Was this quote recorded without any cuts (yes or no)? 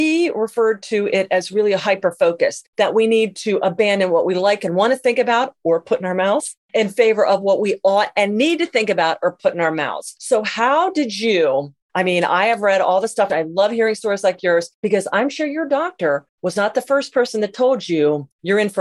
no